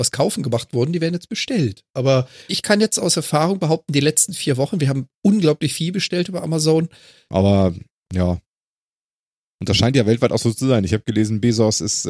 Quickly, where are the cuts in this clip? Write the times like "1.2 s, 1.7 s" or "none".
2.5 s, 7.3 s